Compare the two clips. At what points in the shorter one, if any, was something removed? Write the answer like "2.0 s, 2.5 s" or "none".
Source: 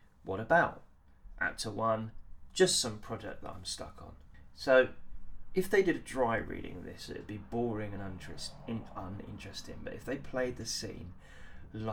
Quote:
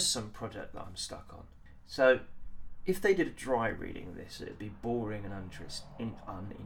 none